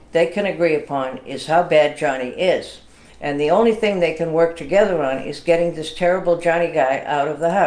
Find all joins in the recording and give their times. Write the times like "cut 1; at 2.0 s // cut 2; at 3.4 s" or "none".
none